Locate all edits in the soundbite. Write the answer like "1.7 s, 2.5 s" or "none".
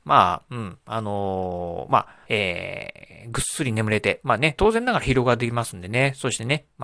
2.2 s, 4.6 s